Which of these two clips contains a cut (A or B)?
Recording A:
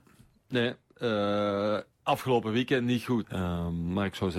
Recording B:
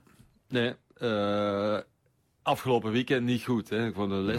A